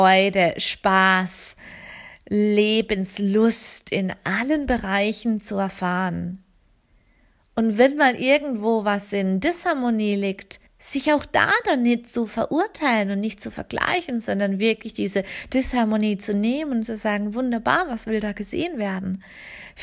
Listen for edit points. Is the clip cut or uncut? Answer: cut